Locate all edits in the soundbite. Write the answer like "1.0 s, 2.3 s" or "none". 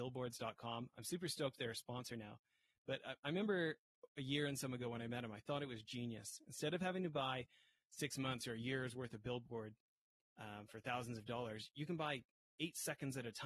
none

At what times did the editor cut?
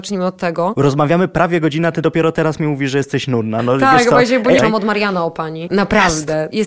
4.6 s, 5.7 s

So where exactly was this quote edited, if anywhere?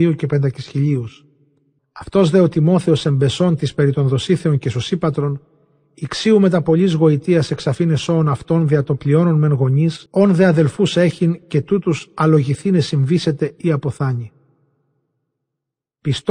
1.8 s, 10.1 s

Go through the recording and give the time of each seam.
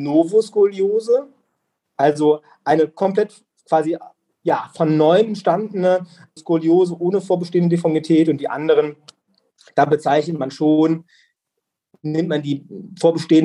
6.4 s

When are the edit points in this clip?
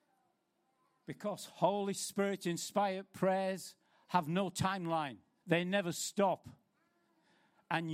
5.4 s

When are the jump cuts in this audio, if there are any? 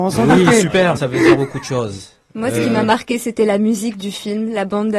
1.0 s

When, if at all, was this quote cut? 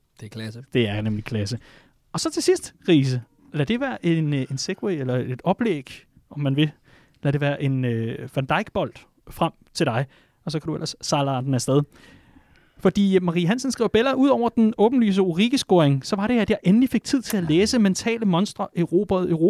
none

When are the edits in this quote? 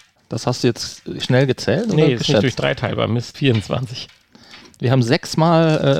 3.3 s

